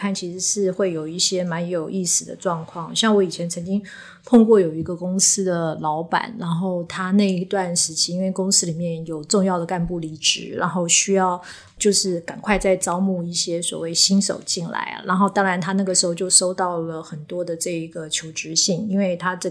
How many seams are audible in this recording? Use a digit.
0